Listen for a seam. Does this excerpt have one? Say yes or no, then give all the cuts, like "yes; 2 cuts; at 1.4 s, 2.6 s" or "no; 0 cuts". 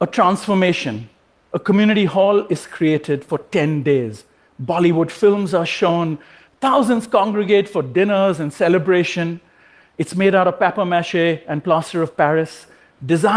no; 0 cuts